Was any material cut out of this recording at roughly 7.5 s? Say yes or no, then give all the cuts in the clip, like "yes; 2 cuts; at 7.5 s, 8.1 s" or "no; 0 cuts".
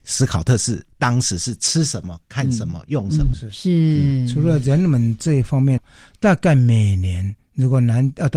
no; 2 cuts; at 3.3 s, 5.8 s